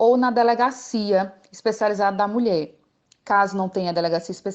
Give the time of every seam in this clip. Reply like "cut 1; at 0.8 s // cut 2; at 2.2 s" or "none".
none